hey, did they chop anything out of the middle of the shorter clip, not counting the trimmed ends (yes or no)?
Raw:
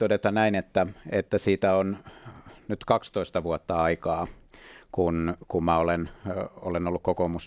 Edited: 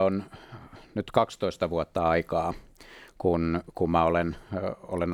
no